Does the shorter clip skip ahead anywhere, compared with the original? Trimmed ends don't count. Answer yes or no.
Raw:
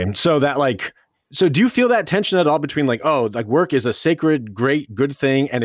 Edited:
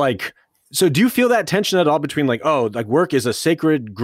no